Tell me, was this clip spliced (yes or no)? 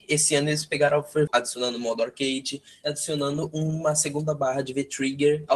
yes